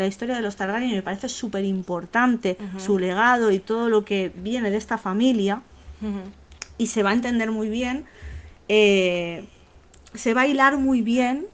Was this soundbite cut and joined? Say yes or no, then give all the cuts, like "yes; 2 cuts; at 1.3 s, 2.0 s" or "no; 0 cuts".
no; 0 cuts